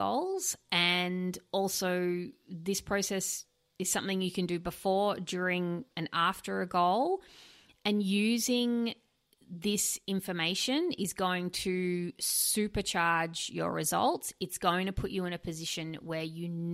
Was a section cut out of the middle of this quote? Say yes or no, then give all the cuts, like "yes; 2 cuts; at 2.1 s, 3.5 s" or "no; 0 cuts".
no; 0 cuts